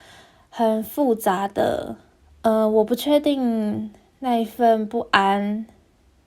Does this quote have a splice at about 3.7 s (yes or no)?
no